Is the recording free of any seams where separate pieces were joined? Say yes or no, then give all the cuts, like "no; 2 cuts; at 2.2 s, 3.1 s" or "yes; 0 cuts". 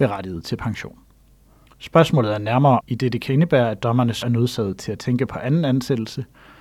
no; 3 cuts; at 1.7 s, 2.8 s, 4.2 s